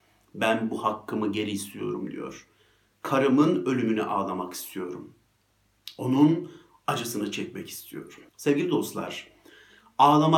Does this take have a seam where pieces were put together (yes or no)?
yes